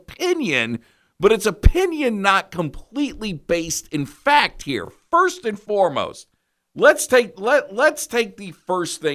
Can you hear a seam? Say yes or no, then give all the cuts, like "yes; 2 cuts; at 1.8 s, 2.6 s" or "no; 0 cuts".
no; 0 cuts